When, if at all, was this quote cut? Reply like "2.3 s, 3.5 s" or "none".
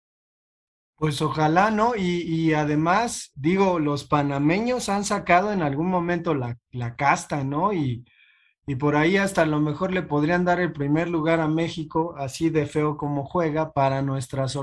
3.3 s